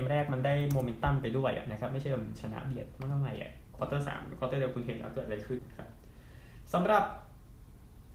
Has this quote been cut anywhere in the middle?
yes; 1 cut; at 5.6 s

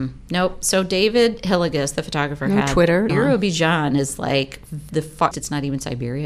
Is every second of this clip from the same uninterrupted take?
no; 2 cuts; at 3.1 s, 5.3 s

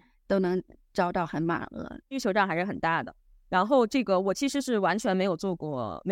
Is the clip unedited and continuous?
no; 1 cut; at 2.0 s

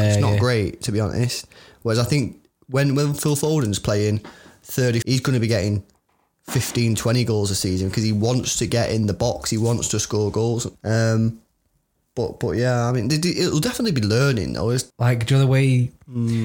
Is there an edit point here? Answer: yes; 3 cuts; at 5.0 s, 10.8 s, 14.9 s

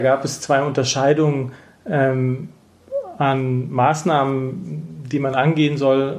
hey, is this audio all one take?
yes; 0 cuts

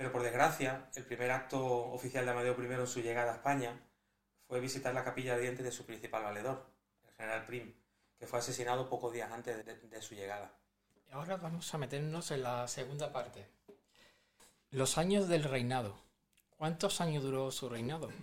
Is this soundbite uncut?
no; 1 cut; at 9.6 s

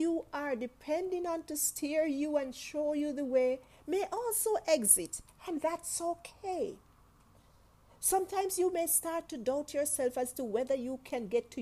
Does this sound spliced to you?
no; 0 cuts

